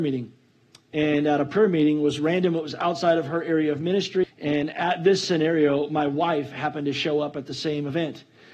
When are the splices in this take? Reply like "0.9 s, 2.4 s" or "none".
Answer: 4.2 s